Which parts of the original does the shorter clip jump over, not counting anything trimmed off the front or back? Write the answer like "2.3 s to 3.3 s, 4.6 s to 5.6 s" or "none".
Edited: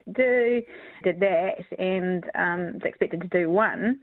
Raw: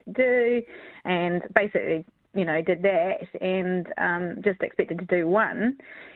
1.0 s to 2.6 s, 4.4 s to 4.6 s